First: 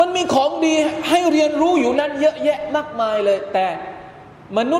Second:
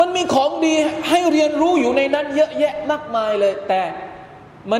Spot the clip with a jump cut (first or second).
first